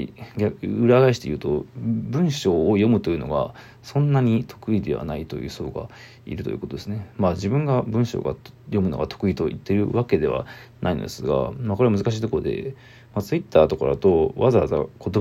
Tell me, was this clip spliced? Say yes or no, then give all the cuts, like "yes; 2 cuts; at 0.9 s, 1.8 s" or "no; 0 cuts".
no; 0 cuts